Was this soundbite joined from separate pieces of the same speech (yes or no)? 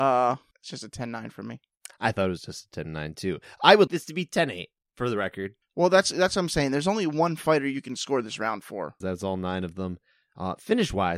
yes